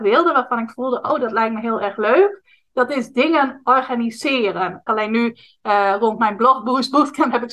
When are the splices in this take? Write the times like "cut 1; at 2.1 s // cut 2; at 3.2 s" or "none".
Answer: cut 1; at 4.9 s